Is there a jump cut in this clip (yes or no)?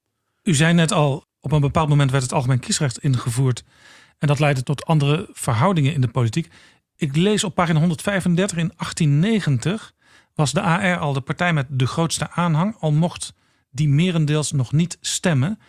yes